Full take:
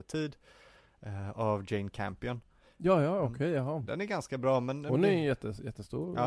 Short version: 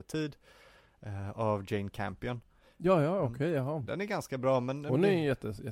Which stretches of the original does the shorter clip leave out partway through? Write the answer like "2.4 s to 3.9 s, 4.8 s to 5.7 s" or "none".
none